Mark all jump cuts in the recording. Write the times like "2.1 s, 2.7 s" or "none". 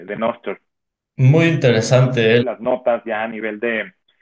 2.4 s

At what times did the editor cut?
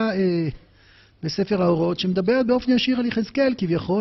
none

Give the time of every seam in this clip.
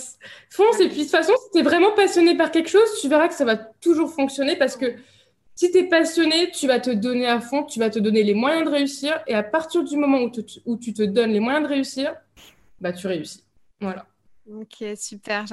none

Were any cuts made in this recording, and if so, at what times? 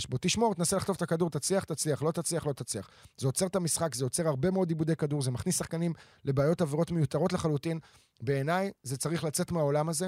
none

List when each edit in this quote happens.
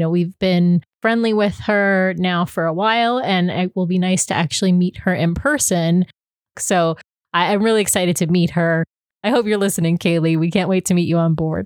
6.5 s, 9.1 s

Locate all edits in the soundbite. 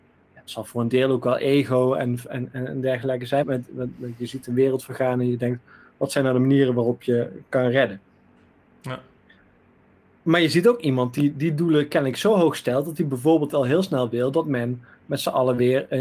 3.4 s

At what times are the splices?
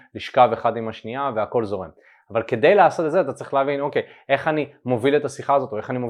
none

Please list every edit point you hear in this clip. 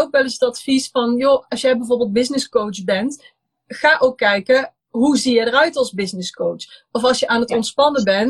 1.5 s

